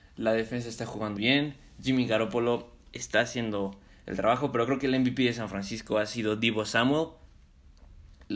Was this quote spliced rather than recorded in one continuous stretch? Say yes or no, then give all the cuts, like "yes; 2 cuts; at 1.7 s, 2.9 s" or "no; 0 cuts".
yes; 1 cut; at 1.2 s